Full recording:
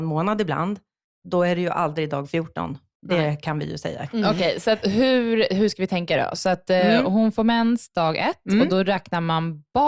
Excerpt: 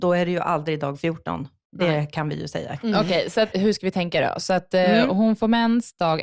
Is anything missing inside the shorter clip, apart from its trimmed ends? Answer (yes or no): yes